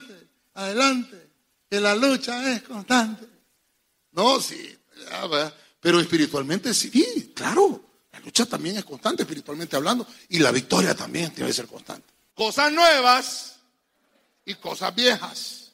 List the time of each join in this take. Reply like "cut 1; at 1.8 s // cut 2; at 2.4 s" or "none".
cut 1; at 6.9 s // cut 2; at 12.3 s

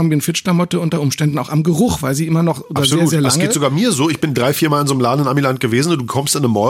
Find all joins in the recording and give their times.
none

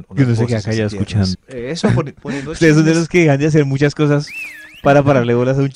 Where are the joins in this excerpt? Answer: cut 1; at 1.3 s

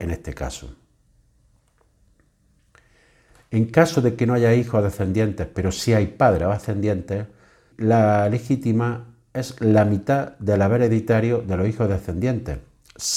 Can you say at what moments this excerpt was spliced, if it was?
cut 1; at 7.7 s

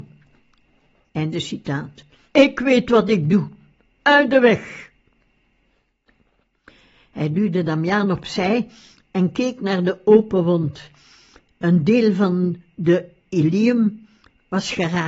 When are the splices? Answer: cut 1; at 2.2 s

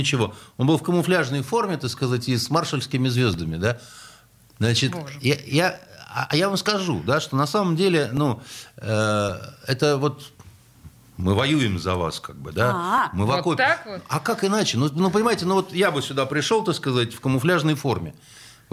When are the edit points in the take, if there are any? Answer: none

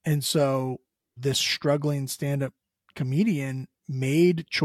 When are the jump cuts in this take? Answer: cut 1; at 1.2 s

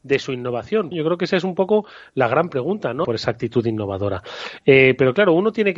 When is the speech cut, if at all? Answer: cut 1; at 0.9 s // cut 2; at 3.0 s

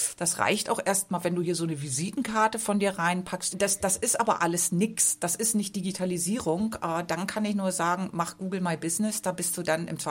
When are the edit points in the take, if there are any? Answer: cut 1; at 3.5 s

